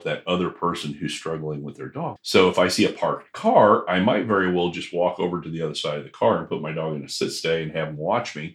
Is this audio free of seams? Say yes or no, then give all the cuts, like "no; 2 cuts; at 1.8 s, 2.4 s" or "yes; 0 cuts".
no; 1 cut; at 2.2 s